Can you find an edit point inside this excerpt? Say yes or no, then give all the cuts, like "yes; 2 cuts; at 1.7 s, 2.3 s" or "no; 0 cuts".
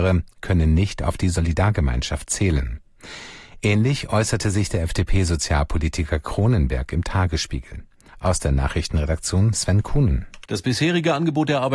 yes; 2 cuts; at 8.1 s, 10.5 s